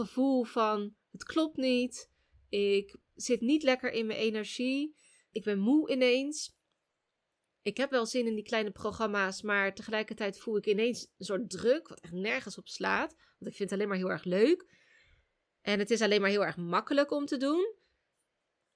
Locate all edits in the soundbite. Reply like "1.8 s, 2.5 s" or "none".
none